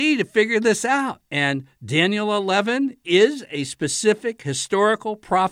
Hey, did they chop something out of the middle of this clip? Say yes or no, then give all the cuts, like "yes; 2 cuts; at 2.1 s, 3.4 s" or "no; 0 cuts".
yes; 1 cut; at 1.3 s